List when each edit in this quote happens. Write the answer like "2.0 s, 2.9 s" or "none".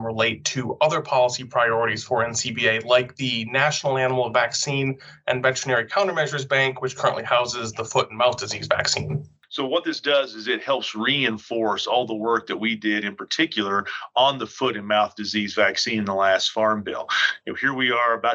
none